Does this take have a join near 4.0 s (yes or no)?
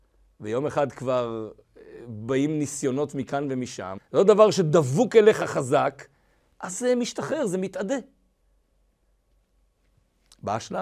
yes